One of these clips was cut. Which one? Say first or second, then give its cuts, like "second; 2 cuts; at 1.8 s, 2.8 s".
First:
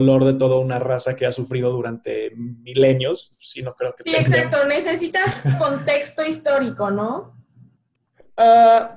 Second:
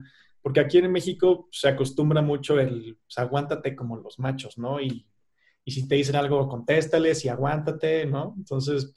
first; 1 cut; at 3.3 s